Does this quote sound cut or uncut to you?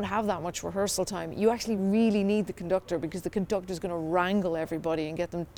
uncut